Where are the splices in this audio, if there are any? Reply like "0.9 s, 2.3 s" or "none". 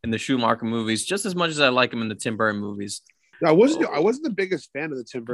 3.3 s